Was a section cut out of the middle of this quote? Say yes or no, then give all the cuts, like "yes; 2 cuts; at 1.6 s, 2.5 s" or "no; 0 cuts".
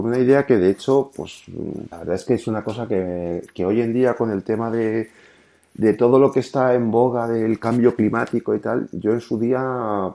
yes; 1 cut; at 1.9 s